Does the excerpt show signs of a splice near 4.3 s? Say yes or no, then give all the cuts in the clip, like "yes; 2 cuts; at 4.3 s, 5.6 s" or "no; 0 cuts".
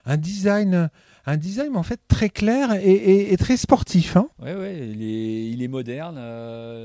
yes; 1 cut; at 4.3 s